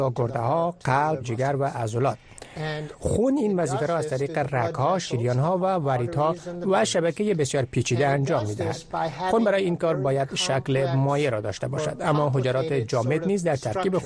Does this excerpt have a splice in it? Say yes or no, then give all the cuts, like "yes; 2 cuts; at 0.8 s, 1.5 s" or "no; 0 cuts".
yes; 1 cut; at 1.2 s